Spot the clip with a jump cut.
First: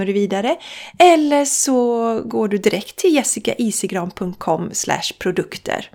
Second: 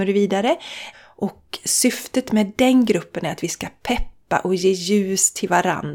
second; 1 cut; at 0.9 s

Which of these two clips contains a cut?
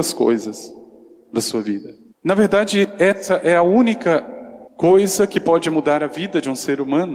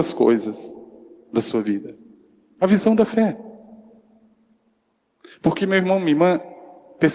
first; 2 cuts; at 2.1 s, 4.7 s

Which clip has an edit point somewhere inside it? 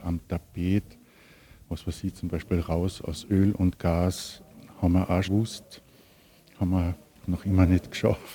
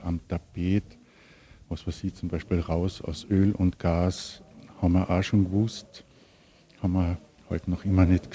first; 2 cuts; at 5.2 s, 7.2 s

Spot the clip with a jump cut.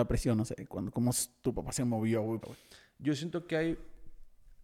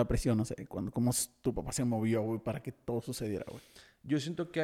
first; 1 cut; at 2.4 s

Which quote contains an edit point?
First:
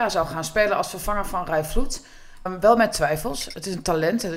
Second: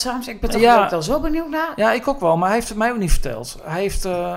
first; 1 cut; at 2.5 s

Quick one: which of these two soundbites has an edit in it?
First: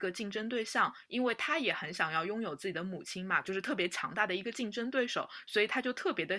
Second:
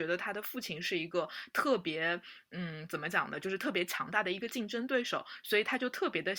first; 1 cut; at 3.4 s

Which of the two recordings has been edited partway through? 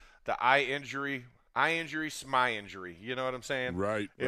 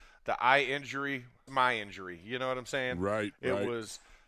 second; 1 cut; at 1.5 s

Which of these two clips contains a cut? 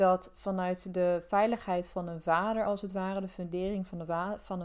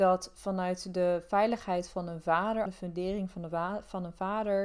second; 1 cut; at 2.7 s

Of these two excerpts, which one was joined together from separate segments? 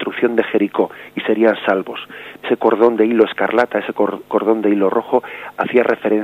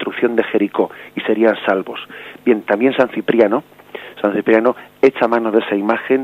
first; 1 cut; at 2.4 s

